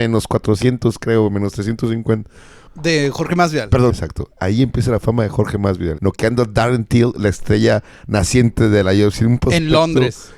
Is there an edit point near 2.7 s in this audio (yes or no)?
yes